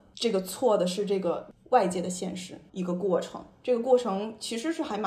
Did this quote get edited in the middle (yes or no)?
yes